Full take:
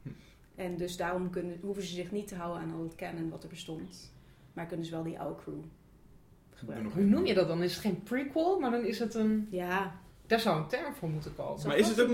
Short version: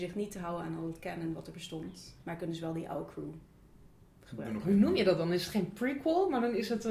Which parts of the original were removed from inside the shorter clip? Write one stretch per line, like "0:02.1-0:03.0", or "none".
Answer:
0:04.2-0:04.5

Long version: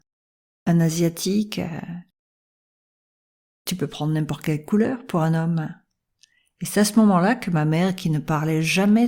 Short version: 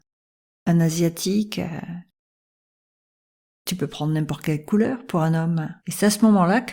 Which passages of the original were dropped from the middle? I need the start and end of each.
0:05.8-0:06.5

